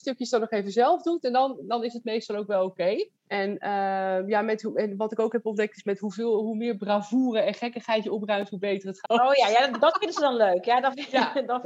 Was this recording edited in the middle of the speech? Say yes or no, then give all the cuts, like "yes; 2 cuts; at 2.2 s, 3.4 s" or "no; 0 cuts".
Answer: yes; 2 cuts; at 3.2 s, 9.0 s